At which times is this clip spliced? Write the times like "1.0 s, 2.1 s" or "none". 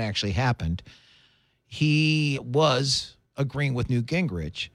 2.3 s